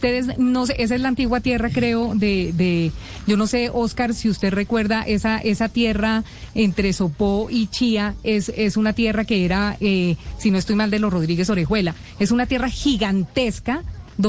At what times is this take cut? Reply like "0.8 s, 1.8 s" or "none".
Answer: none